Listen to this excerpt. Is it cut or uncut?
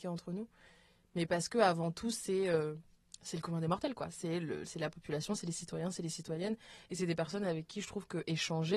uncut